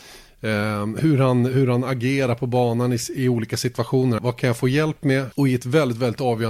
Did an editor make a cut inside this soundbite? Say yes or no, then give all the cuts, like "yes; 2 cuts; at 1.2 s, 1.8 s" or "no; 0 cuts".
yes; 2 cuts; at 4.2 s, 5.3 s